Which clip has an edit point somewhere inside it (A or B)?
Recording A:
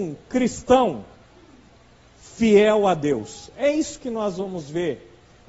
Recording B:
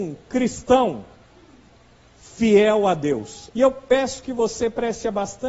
B